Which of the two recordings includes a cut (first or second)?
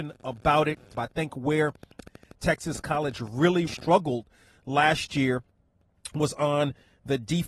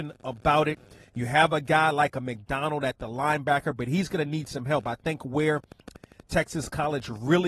first